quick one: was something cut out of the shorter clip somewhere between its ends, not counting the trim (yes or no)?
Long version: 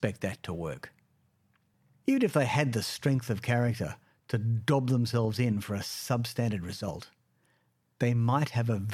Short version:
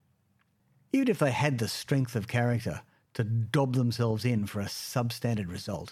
no